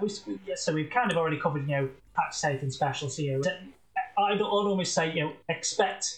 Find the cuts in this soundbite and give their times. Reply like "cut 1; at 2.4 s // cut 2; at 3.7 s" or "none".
cut 1; at 3.4 s